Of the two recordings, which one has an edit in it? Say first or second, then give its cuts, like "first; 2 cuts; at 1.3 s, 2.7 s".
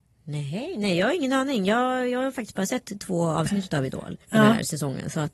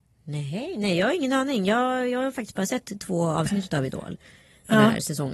first; 1 cut; at 4.2 s